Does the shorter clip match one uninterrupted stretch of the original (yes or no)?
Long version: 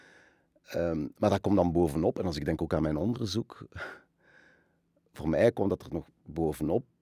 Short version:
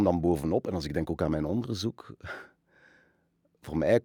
yes